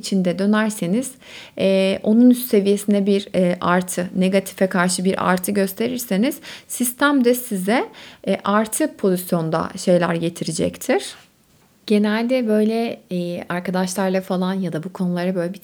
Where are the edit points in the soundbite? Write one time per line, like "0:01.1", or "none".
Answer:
none